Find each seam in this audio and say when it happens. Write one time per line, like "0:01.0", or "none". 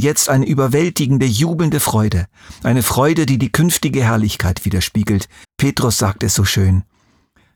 0:05.4